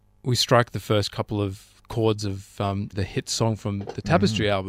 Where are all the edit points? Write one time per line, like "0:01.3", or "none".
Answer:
0:02.9